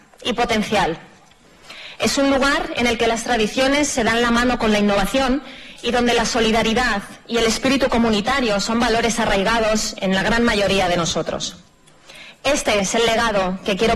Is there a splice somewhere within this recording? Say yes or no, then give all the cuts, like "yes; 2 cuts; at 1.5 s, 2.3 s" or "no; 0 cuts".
no; 0 cuts